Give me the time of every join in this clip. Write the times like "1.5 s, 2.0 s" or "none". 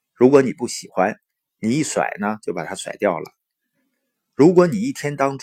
none